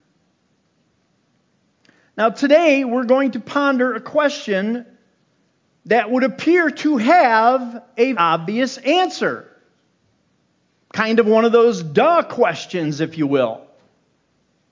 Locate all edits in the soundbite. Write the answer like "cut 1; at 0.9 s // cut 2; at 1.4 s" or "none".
cut 1; at 8.1 s